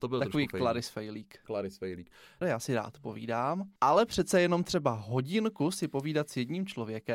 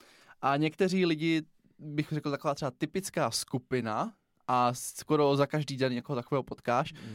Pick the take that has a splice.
first; 2 cuts; at 2.4 s, 3.8 s

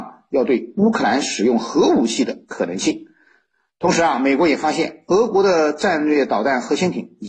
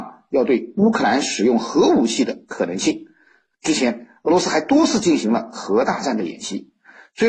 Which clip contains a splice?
second; 1 cut; at 3.5 s

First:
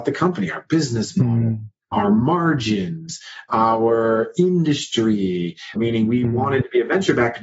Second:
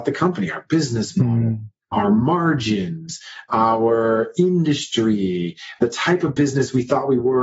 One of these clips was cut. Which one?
first; 1 cut; at 5.8 s

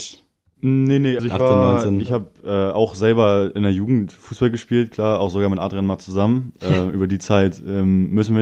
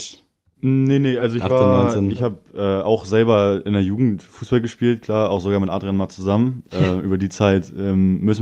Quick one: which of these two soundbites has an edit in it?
first; 1 cut; at 1.2 s

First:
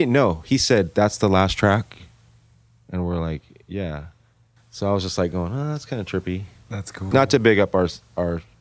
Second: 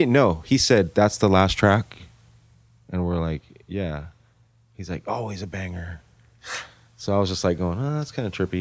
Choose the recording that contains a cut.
first; 2 cuts; at 4.6 s, 7.1 s

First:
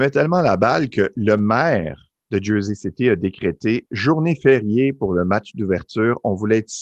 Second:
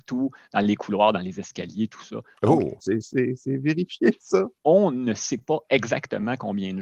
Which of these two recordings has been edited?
second; 1 cut; at 2.8 s

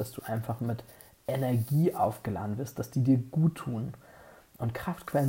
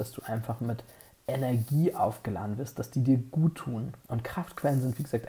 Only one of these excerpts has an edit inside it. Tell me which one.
second; 1 cut; at 4.0 s

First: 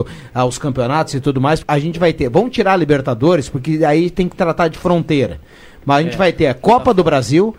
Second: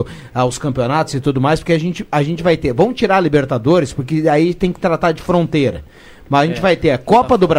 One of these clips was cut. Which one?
first; 1 cut; at 1.6 s

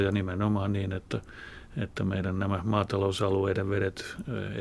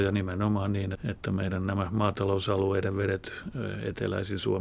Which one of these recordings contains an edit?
second; 1 cut; at 0.9 s

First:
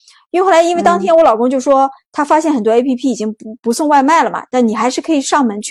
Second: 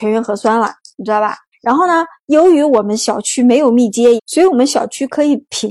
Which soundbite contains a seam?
second; 2 cuts; at 1.5 s, 4.2 s

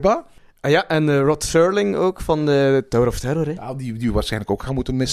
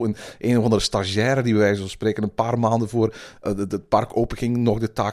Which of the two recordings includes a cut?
second; 1 cut; at 3.4 s

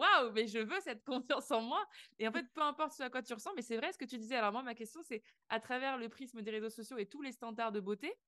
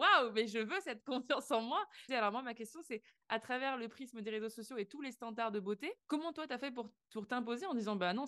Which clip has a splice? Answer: second; 2 cuts; at 2.1 s, 6.0 s

